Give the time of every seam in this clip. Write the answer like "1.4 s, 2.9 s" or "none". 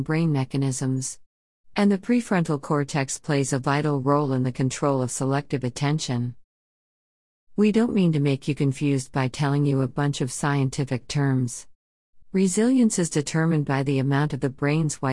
1.7 s, 12.2 s